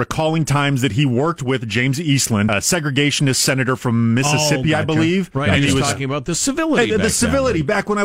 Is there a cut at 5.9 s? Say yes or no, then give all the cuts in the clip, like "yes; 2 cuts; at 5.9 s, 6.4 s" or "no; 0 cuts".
no; 1 cut; at 2.5 s